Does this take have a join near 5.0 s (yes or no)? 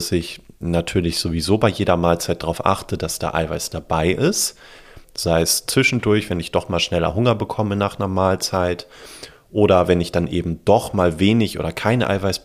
yes